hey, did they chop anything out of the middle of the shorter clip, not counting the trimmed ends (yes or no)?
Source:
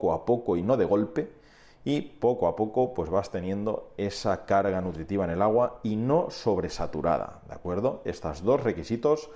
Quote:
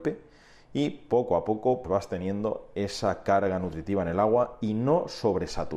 yes